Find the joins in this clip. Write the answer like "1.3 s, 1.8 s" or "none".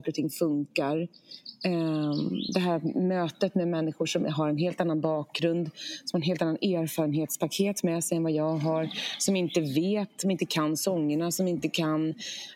none